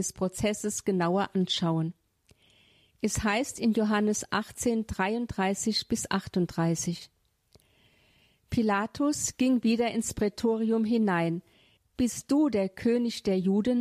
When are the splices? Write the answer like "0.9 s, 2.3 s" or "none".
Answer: 11.8 s